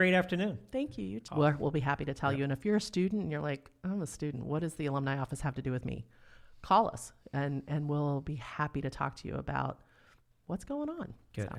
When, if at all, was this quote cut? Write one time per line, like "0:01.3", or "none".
0:01.3